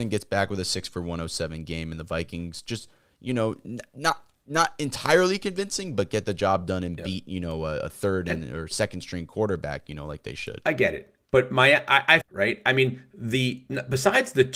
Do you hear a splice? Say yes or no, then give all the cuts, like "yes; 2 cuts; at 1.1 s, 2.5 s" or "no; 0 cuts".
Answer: yes; 1 cut; at 12.2 s